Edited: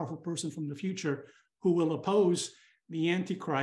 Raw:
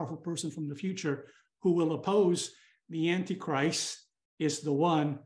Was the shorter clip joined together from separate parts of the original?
no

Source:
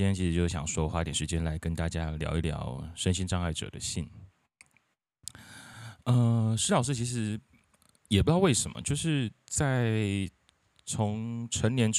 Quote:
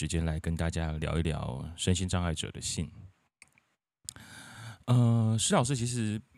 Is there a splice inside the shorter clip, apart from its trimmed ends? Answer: no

